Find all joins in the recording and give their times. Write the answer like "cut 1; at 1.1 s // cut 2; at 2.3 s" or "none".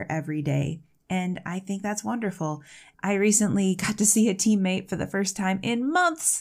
cut 1; at 2.9 s